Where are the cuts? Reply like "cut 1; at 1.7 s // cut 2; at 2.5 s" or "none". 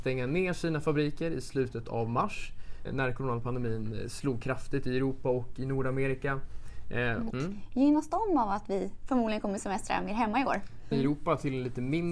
cut 1; at 2.8 s // cut 2; at 7.3 s // cut 3; at 10.9 s